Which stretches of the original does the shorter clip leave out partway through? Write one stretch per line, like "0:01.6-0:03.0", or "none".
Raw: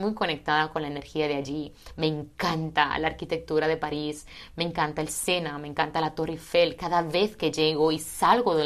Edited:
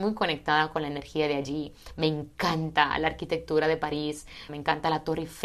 0:04.5-0:05.6